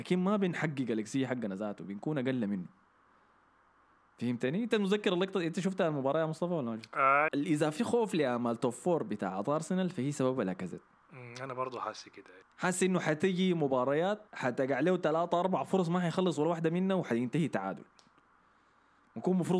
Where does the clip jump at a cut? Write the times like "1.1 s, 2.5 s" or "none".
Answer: 7.3 s, 14.3 s